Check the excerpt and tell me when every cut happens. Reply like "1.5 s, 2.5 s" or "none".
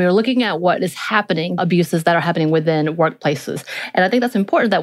1.6 s